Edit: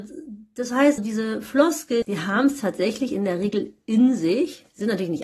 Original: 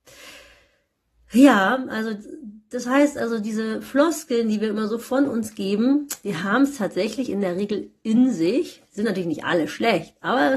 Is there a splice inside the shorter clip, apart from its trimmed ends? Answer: yes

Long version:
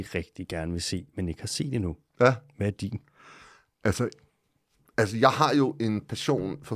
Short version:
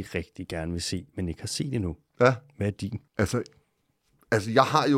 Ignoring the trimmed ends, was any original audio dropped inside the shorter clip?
yes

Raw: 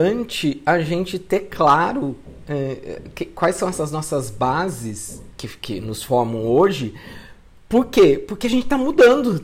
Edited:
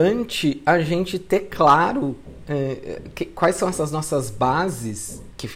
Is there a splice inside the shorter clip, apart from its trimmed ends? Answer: no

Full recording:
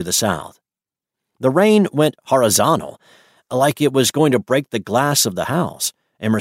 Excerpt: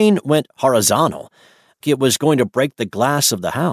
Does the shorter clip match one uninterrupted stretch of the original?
no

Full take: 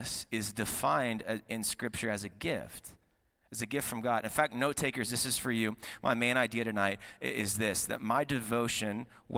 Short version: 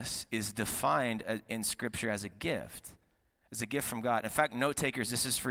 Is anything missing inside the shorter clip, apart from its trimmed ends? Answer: no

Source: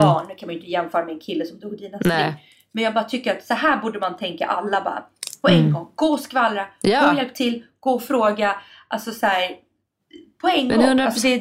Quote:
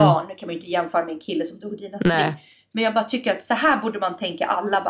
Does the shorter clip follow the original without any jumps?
yes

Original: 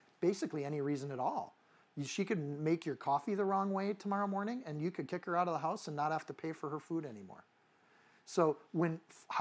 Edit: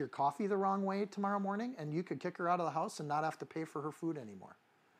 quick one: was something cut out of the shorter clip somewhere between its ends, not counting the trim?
no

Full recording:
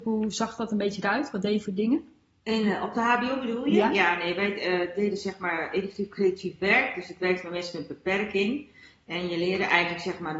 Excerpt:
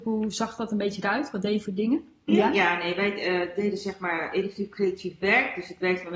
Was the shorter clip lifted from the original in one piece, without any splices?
no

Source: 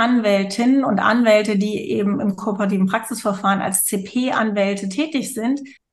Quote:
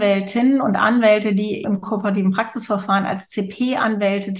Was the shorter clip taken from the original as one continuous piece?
no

